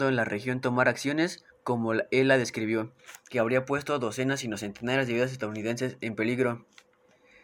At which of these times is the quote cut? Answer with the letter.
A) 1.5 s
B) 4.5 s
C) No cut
A